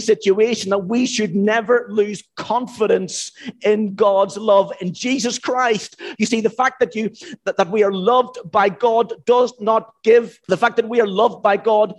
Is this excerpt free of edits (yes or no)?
no